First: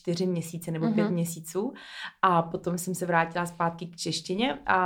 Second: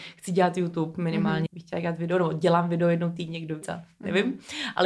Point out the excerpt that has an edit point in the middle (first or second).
second